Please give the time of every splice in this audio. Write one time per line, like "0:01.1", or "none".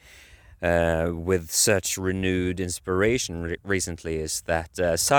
none